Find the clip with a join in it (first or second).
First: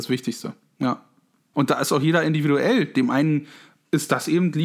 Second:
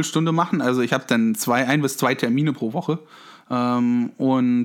first